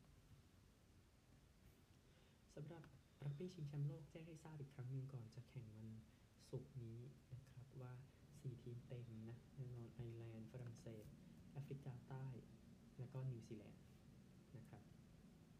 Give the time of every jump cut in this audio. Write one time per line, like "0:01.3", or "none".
none